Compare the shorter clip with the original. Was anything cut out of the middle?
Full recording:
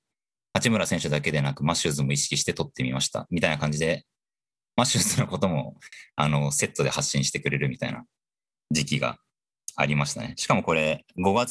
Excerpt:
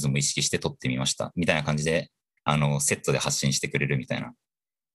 yes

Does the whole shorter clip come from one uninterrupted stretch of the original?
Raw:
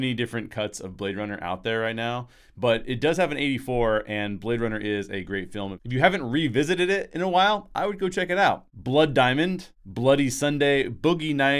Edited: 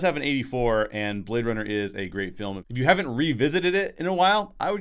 yes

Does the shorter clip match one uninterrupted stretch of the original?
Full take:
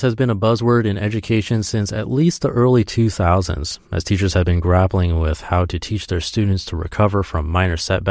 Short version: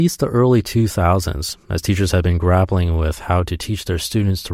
yes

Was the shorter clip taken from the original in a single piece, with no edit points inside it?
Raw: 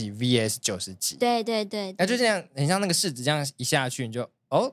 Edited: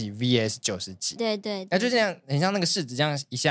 no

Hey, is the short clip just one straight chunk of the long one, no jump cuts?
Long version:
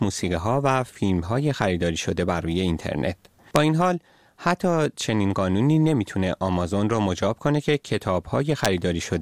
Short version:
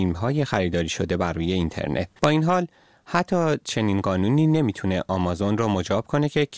no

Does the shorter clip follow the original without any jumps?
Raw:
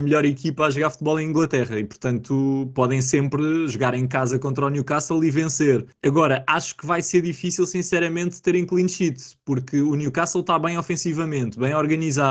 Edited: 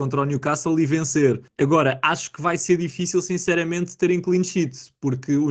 yes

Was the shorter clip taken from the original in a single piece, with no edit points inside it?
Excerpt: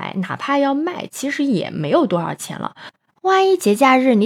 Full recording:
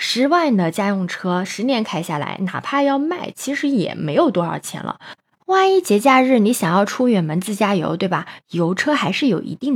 yes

